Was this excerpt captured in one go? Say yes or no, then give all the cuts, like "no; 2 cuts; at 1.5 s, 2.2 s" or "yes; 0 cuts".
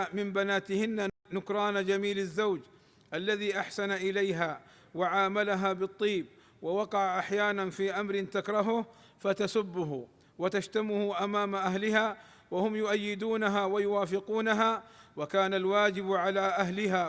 no; 1 cut; at 1.2 s